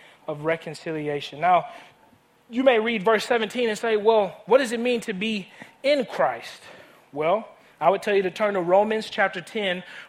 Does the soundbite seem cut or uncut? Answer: uncut